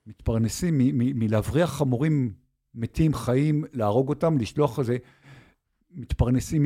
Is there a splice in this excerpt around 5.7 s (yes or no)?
no